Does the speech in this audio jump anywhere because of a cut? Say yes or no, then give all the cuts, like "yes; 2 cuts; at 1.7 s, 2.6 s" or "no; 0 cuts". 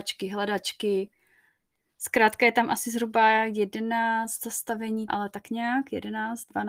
yes; 1 cut; at 5.1 s